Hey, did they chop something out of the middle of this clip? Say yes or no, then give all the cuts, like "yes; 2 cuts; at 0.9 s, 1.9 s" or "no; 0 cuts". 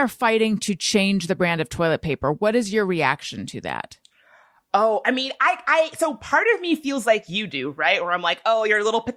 no; 0 cuts